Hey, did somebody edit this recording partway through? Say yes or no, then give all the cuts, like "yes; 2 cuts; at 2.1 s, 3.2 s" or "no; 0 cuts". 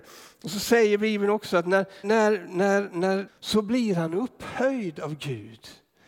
yes; 2 cuts; at 2.0 s, 3.3 s